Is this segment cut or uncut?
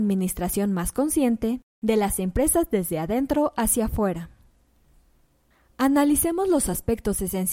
uncut